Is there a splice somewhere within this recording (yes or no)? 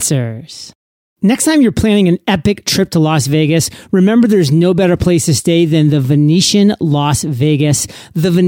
no